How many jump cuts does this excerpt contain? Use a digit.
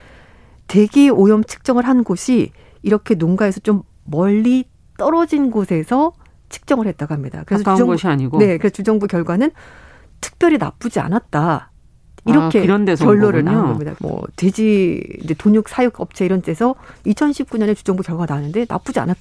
2